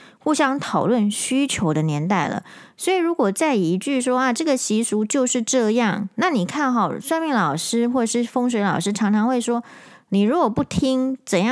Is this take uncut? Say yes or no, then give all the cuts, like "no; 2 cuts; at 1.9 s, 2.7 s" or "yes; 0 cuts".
yes; 0 cuts